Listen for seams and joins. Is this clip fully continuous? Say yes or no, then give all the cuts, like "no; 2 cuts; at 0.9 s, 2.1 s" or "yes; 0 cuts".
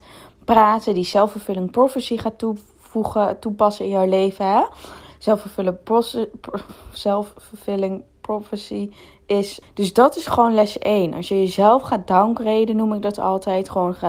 no; 1 cut; at 9.6 s